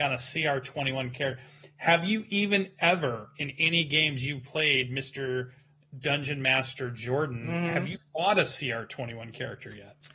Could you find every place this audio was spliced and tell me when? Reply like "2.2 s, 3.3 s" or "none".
none